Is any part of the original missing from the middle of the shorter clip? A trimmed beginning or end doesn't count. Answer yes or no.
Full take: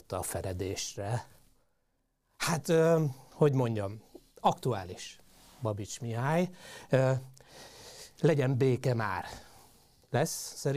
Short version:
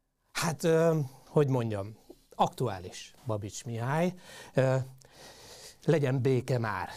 yes